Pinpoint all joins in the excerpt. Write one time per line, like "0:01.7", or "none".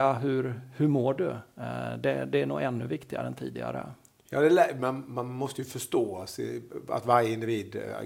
none